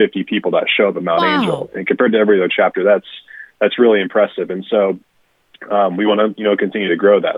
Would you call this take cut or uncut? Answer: uncut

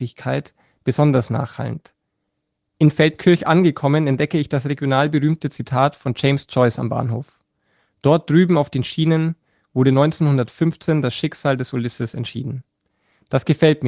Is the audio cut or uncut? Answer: cut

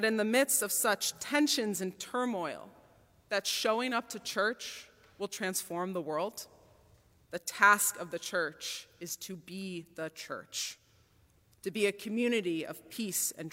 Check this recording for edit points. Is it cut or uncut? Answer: cut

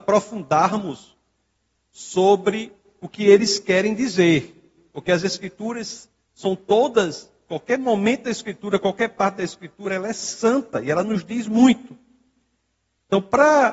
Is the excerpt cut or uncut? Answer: uncut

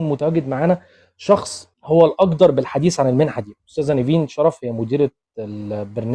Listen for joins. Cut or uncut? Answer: cut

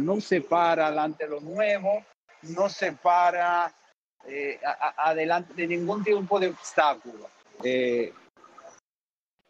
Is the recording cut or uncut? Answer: cut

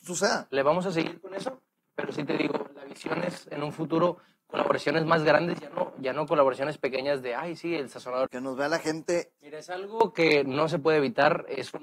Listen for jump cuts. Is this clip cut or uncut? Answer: cut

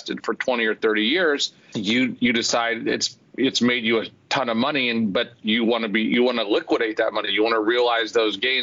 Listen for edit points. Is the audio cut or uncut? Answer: cut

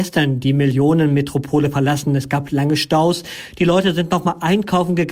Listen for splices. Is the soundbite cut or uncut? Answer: uncut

